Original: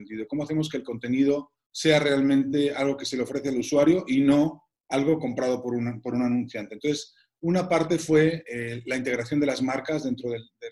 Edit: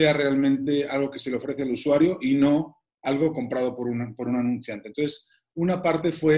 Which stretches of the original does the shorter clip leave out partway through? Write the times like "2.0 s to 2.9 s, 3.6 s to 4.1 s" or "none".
none